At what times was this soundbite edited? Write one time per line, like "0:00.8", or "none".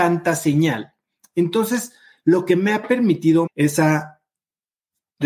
0:03.5